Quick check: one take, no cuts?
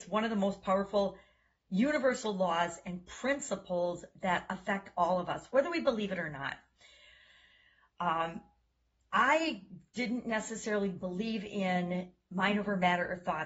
yes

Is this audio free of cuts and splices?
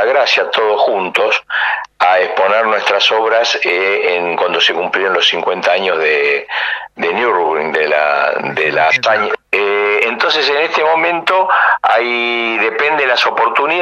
no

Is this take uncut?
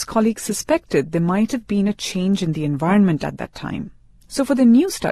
yes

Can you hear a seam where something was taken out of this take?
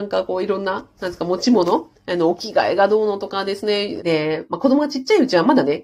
yes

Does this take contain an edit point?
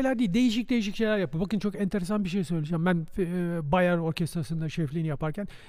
no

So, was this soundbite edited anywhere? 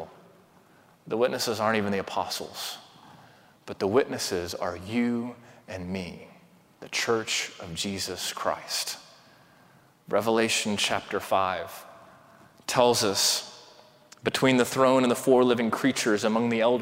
no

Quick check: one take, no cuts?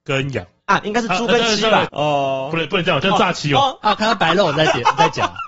no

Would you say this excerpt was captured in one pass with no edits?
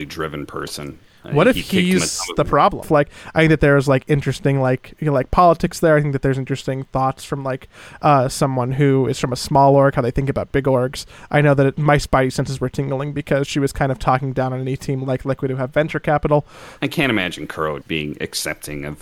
no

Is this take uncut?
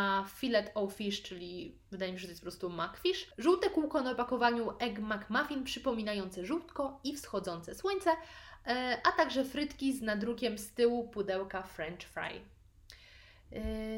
yes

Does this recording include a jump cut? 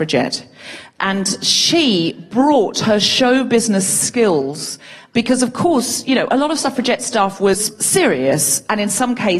no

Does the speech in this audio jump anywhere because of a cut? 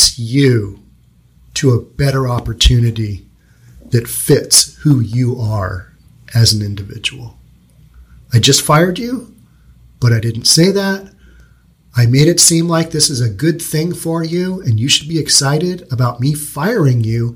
no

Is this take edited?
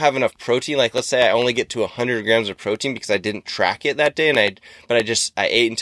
no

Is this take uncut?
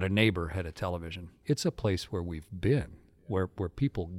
no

